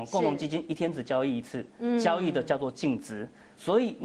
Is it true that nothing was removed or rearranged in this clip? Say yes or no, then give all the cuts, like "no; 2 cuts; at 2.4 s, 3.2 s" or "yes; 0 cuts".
yes; 0 cuts